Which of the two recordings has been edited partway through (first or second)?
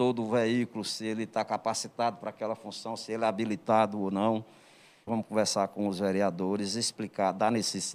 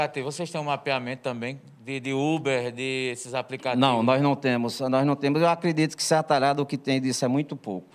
first